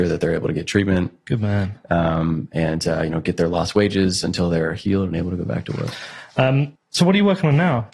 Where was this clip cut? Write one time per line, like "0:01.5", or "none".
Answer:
none